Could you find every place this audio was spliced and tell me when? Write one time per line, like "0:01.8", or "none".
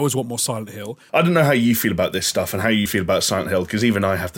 0:01.1
0:02.9